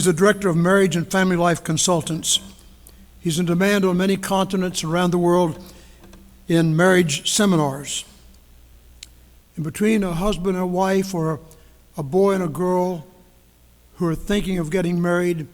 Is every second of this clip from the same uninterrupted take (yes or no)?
no